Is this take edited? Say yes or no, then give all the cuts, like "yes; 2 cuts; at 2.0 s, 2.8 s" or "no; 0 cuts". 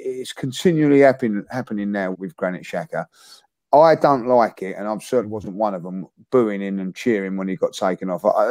yes; 1 cut; at 2.1 s